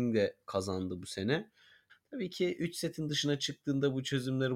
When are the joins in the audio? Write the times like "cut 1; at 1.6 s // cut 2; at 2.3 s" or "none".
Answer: cut 1; at 1.9 s